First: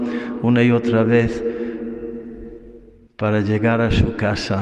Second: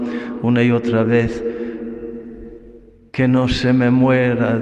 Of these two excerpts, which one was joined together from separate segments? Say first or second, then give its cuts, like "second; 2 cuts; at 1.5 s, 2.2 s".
first; 1 cut; at 3.1 s